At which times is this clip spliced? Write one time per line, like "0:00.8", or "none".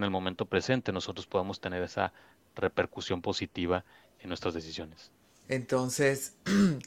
0:05.4